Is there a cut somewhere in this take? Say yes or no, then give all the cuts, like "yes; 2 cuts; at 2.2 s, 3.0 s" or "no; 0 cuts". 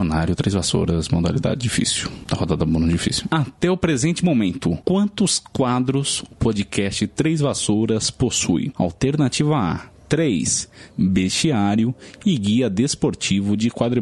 yes; 2 cuts; at 3.3 s, 10.9 s